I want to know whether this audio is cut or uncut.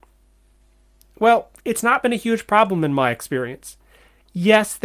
uncut